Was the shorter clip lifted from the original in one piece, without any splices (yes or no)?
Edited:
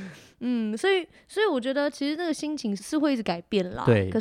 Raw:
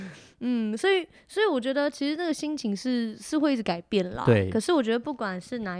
no